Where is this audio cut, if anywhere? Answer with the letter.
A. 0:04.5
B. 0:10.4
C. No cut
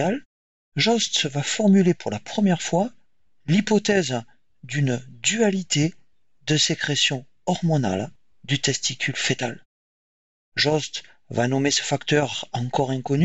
B